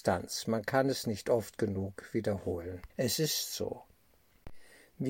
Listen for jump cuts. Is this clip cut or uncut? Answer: cut